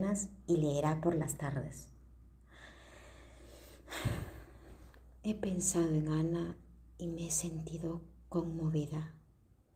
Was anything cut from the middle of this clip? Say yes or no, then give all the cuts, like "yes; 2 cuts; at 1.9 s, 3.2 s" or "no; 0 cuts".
no; 0 cuts